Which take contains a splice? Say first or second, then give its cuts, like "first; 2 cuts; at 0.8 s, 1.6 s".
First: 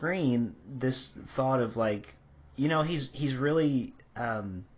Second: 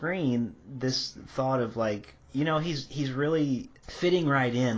second; 2 cuts; at 2.2 s, 3.8 s